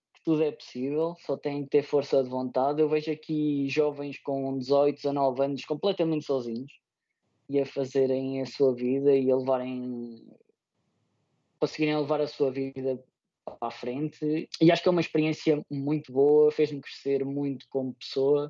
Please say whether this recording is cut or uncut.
uncut